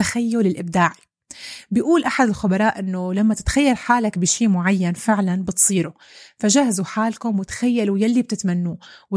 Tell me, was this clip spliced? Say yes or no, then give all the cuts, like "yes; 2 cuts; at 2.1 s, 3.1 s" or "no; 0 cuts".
no; 0 cuts